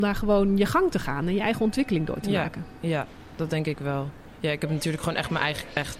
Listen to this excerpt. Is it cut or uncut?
uncut